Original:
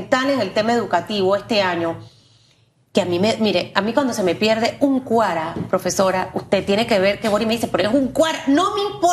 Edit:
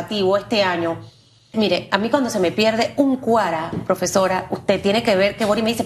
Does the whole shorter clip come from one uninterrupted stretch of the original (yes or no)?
no